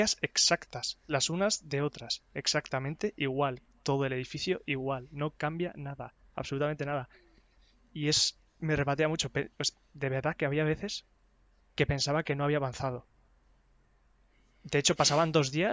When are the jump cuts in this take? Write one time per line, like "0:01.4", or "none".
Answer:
none